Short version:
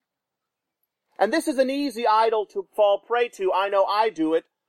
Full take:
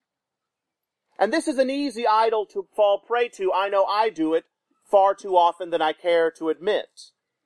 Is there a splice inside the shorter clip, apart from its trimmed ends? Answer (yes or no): no